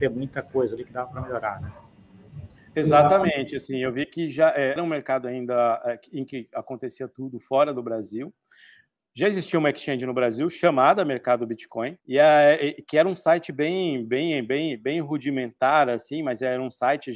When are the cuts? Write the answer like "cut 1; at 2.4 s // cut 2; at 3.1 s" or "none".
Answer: cut 1; at 4.8 s // cut 2; at 12.0 s